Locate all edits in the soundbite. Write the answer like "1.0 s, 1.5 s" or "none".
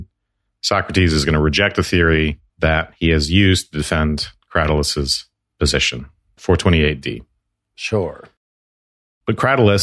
none